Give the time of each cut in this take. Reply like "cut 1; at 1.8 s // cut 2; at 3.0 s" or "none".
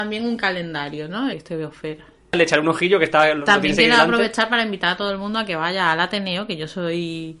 cut 1; at 1.3 s